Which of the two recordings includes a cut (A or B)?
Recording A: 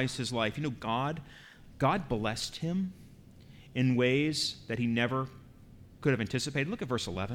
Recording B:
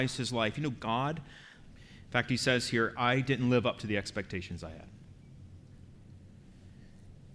B